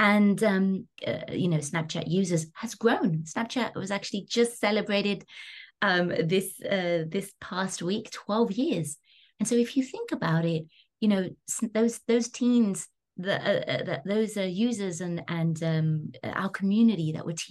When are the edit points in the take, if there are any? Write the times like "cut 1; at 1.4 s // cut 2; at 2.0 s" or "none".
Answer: cut 1; at 1.0 s